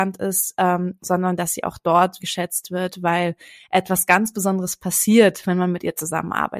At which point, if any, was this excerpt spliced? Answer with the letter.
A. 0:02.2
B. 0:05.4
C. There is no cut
A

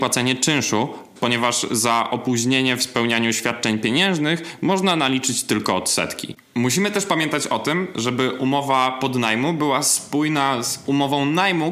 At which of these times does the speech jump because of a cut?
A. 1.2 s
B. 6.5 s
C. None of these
A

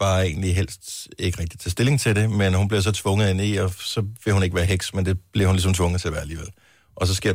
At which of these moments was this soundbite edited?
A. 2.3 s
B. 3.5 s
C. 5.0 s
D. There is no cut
D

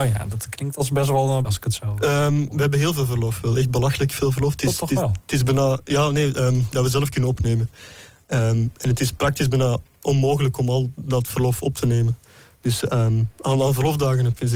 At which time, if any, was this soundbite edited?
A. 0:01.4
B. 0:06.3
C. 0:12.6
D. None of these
A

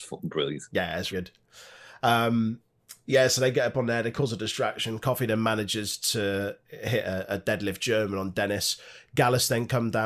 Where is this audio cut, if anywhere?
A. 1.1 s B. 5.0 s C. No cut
A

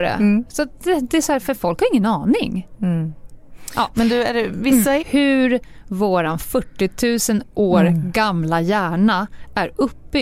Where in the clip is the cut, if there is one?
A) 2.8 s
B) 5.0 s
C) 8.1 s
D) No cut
B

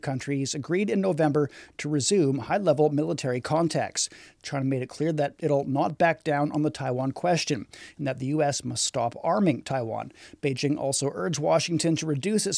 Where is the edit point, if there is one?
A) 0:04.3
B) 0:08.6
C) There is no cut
C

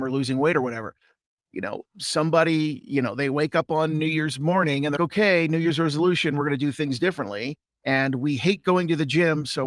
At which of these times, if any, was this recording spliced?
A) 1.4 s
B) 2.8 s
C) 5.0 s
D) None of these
C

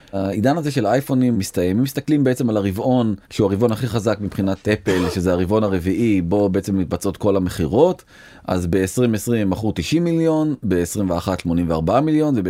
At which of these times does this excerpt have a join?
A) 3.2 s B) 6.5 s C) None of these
A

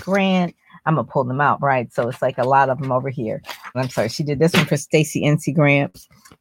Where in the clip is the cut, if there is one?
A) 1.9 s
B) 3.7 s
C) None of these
B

